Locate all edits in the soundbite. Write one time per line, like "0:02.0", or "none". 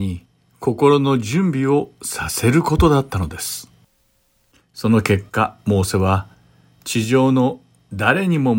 none

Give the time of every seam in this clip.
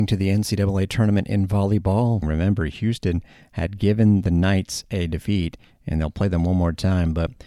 0:02.2

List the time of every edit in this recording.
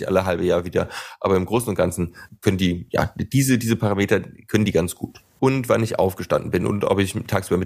0:05.4

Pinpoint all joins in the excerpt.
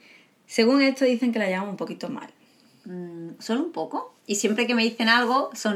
0:04.2

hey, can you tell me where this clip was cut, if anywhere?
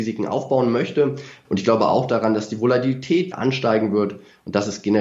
0:01.4
0:03.3

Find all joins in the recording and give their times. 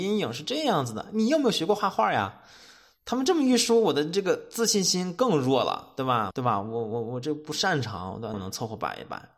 0:06.3
0:08.3

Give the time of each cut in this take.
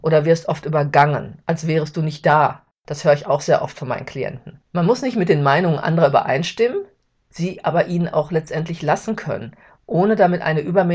0:04.7

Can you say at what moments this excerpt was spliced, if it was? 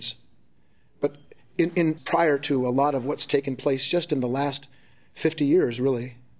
0:02.0

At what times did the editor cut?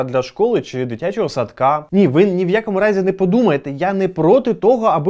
none

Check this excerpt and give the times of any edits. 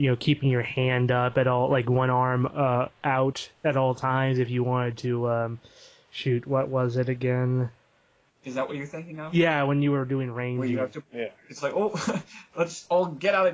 0:08.3
0:11.0

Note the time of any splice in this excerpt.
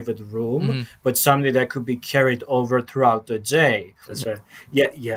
0:04.1

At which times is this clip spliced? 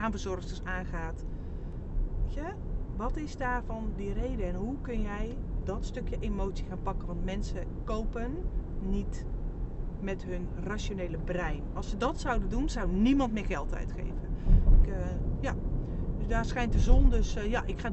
0:14.8

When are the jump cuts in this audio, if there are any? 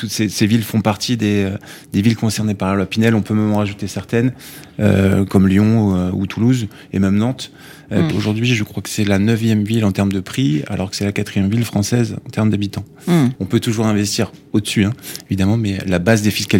0:08.1
0:13.4

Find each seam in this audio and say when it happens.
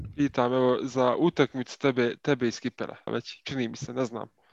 0:03.1

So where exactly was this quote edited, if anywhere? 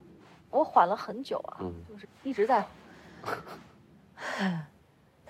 0:02.0

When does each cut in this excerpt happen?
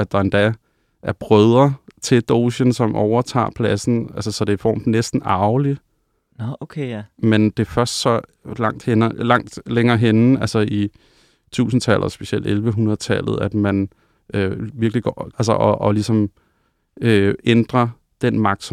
0:15.3

